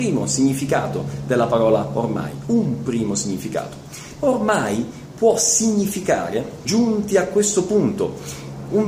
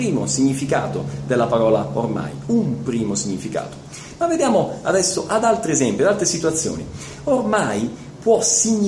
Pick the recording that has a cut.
first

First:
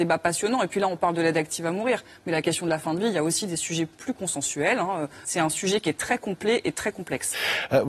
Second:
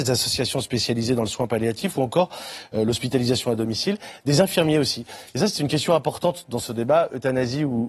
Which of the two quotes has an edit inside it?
first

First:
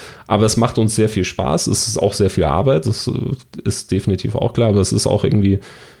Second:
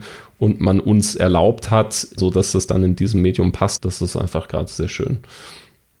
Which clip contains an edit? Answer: second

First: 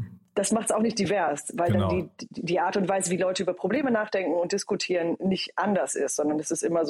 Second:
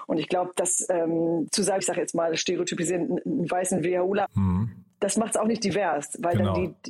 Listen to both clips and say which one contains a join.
second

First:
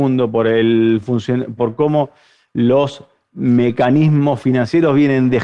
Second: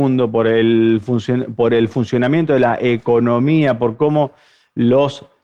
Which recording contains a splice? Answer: first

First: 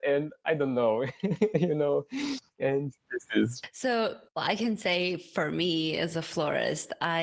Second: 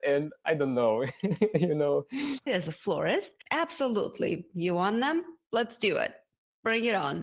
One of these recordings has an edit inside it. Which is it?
second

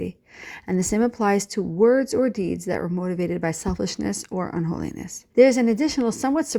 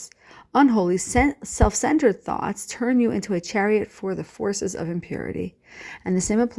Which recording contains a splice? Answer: first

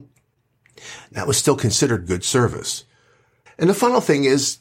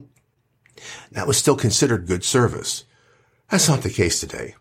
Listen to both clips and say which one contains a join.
first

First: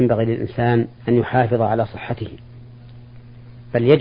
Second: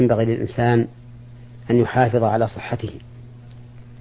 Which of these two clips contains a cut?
first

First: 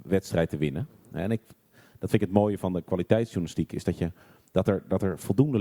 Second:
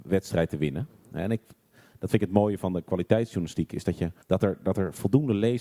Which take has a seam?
second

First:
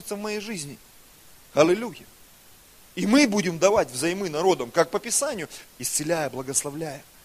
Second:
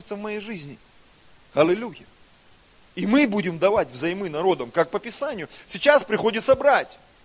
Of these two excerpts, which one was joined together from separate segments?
first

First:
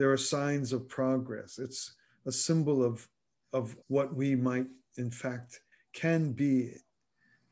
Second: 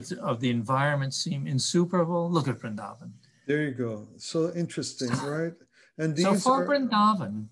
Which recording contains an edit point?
first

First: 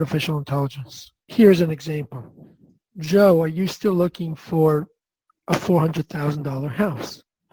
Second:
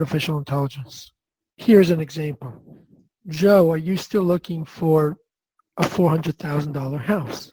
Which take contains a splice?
first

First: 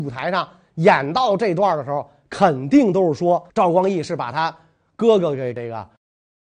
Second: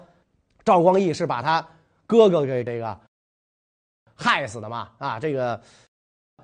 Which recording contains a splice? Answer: first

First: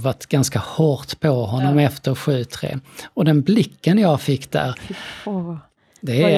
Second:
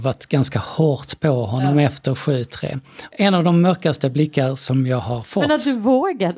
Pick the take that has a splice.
second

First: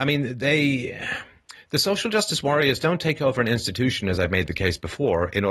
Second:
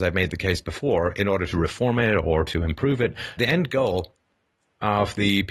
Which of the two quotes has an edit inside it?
second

